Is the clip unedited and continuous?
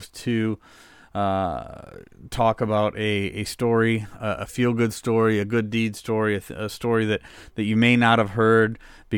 yes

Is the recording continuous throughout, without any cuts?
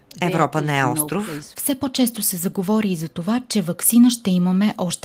no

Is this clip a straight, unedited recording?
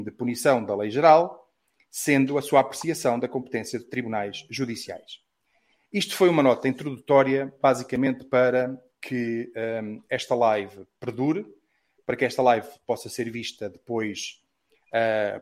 yes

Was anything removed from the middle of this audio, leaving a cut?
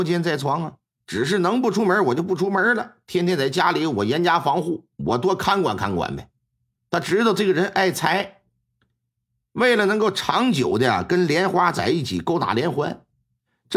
yes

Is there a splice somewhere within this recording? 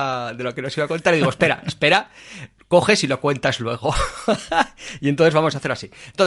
no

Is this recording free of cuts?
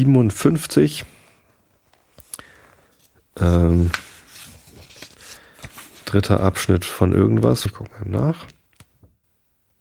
no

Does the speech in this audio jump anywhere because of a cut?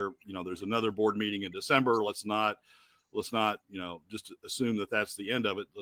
no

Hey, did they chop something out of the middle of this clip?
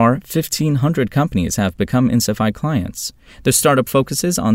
no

